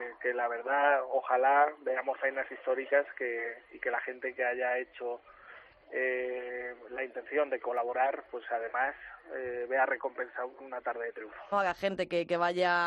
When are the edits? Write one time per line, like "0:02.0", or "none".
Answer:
0:11.5